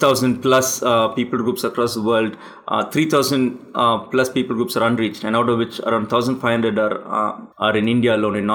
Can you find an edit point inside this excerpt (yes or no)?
yes